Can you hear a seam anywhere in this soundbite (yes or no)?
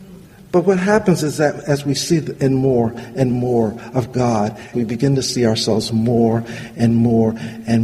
yes